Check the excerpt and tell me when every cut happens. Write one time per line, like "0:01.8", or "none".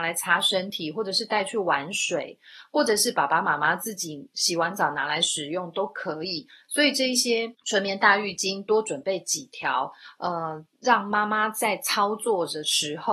none